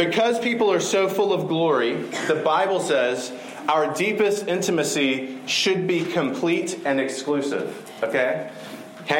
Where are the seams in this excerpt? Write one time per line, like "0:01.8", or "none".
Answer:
none